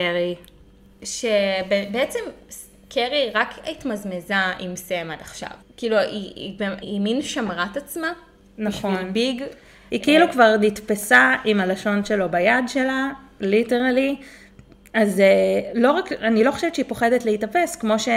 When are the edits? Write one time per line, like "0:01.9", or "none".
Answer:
0:05.6
0:06.8